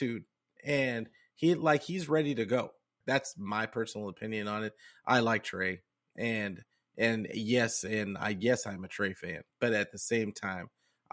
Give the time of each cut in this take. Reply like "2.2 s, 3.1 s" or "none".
3.0 s